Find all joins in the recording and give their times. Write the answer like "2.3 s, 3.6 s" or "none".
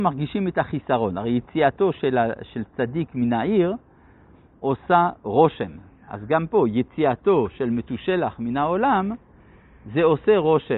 none